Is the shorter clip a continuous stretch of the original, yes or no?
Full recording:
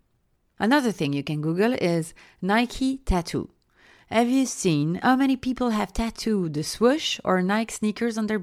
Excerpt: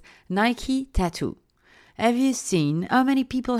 yes